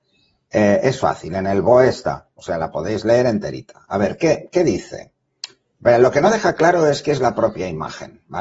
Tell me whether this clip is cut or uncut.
uncut